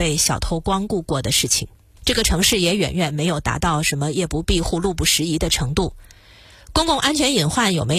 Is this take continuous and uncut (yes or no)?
yes